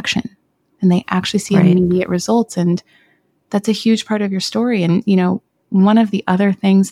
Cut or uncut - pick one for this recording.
uncut